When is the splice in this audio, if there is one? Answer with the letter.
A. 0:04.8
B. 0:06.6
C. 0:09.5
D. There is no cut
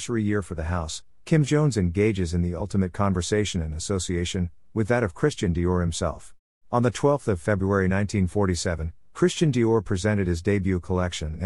B